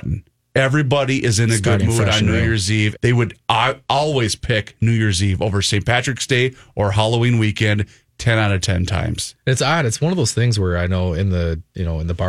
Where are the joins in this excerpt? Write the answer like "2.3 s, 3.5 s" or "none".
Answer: 3.0 s